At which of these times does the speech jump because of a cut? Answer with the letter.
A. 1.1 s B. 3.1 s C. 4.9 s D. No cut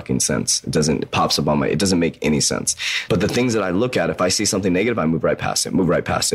B